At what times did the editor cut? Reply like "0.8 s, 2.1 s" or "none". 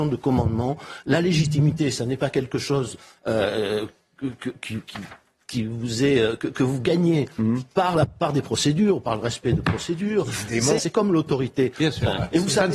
10.8 s